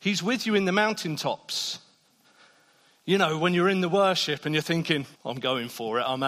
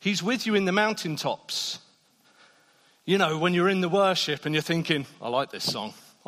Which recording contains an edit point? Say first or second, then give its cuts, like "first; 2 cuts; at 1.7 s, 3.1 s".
first; 1 cut; at 5.1 s